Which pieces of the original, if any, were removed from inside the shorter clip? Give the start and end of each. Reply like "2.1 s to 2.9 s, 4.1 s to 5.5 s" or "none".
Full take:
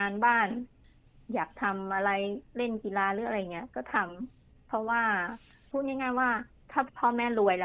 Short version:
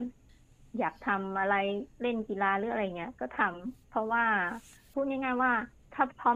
4.4 s to 4.6 s